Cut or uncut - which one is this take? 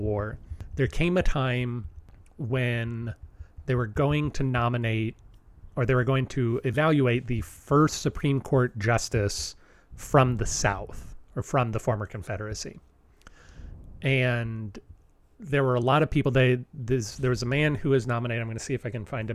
uncut